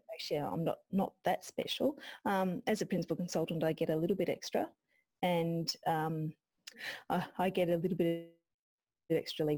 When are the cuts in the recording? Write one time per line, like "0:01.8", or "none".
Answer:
0:06.7